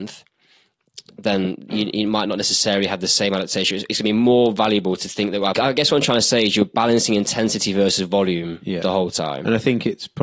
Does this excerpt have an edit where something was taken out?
yes; 1 cut; at 5.5 s

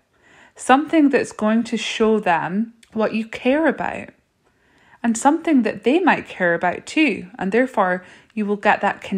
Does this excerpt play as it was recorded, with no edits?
no; 1 cut; at 2.8 s

